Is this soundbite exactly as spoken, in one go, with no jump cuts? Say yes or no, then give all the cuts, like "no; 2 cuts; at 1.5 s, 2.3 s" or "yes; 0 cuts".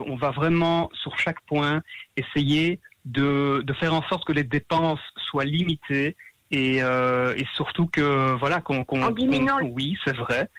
no; 1 cut; at 9.6 s